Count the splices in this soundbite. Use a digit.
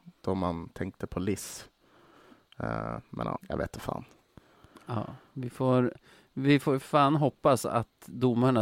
1